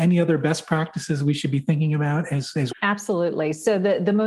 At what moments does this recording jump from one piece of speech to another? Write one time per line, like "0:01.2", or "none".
0:02.7